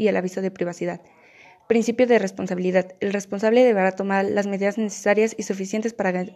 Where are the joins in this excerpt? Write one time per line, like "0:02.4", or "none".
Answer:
none